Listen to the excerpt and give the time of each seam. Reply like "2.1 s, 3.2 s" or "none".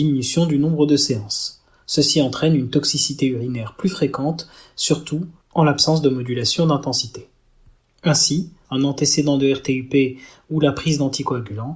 8.6 s

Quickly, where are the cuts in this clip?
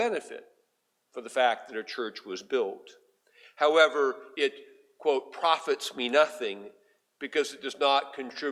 none

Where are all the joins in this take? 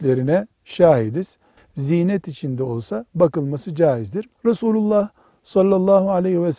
1.6 s, 4.4 s

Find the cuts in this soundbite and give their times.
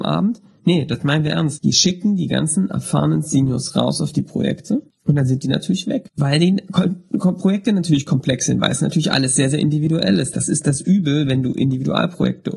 none

